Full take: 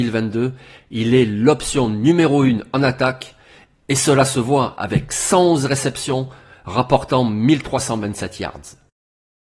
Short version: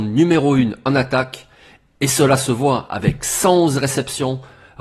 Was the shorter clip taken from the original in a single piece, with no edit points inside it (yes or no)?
yes